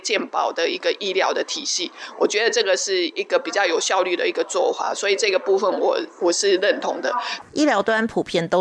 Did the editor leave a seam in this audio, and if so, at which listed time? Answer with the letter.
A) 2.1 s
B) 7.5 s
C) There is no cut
B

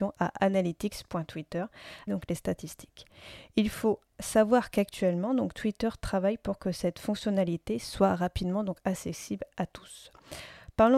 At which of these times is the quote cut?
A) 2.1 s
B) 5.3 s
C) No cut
A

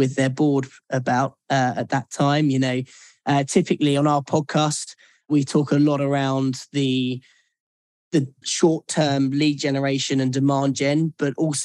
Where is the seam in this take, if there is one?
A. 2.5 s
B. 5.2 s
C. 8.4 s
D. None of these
C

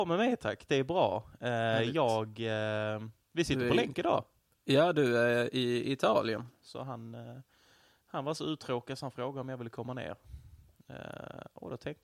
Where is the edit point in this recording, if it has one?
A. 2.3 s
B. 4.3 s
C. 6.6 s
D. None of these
C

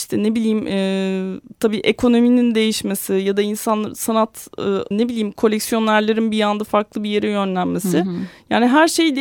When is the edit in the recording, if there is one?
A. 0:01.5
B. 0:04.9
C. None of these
B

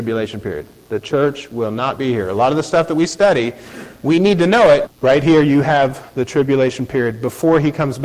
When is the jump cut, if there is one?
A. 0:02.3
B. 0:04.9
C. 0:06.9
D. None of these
B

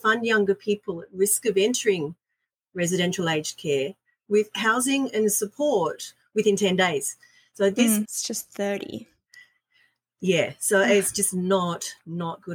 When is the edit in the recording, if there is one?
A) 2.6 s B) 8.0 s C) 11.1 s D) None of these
B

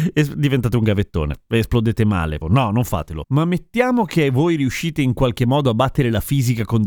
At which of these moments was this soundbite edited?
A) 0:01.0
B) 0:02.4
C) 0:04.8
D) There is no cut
B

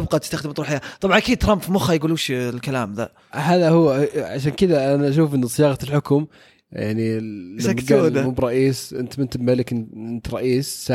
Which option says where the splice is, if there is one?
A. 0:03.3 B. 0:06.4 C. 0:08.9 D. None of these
A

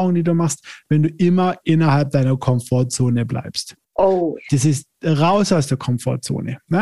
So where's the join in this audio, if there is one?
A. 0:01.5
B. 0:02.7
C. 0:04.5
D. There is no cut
C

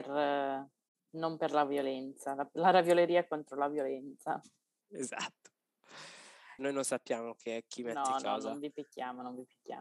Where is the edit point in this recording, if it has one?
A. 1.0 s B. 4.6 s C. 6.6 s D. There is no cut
C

